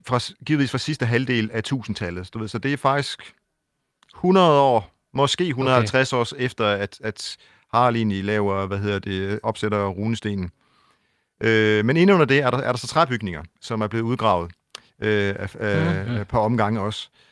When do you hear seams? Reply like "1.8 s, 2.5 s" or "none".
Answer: 9.4 s